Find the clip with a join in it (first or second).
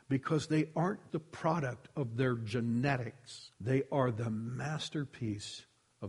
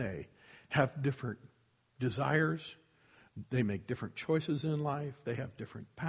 first